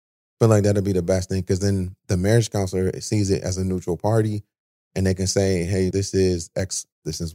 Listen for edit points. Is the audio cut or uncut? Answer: cut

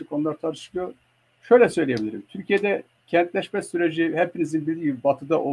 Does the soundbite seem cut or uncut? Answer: uncut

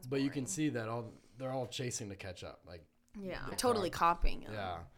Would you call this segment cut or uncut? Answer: cut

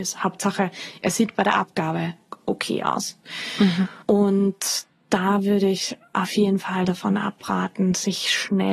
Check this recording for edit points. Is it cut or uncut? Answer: cut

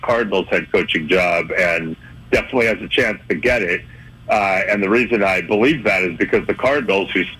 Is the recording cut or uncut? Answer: uncut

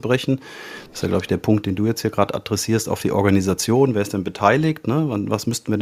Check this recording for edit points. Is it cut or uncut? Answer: uncut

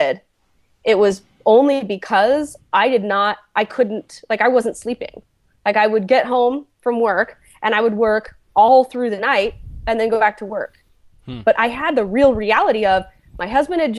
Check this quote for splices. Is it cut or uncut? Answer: cut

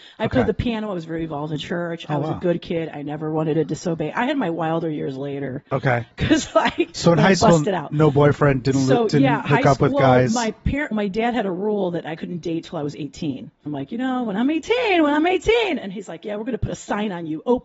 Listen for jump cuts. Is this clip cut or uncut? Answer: cut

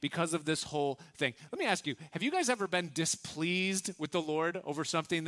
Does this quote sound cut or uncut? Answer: uncut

